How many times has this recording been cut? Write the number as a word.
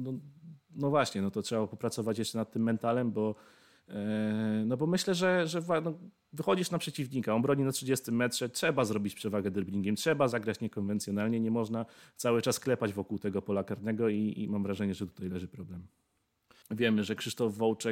one